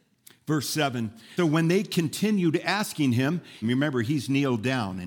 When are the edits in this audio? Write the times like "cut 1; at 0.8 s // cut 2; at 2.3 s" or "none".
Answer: cut 1; at 1.4 s // cut 2; at 3.6 s